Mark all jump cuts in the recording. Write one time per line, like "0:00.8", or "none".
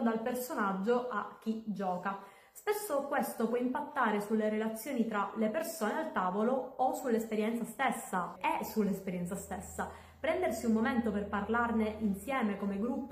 0:08.4